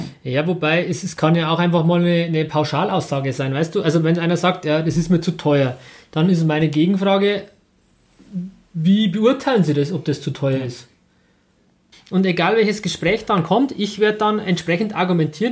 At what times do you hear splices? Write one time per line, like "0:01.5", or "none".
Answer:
0:11.9